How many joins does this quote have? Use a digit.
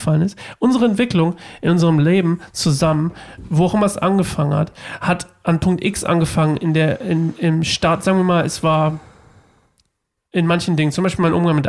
0